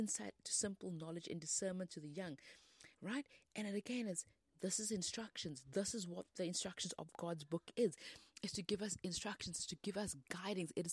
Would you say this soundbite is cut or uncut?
uncut